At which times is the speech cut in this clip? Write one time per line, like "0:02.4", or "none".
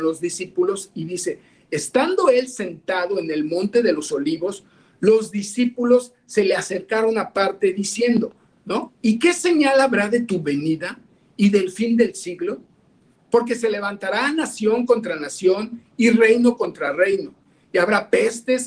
0:08.9
0:13.1